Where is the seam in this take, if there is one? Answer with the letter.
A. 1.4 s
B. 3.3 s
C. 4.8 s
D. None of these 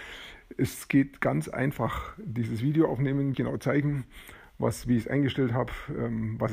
B